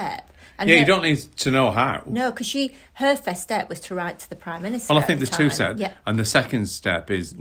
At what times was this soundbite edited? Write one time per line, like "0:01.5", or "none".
0:05.7